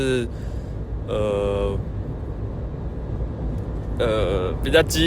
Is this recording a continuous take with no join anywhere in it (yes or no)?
yes